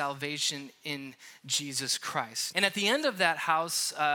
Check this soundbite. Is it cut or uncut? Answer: cut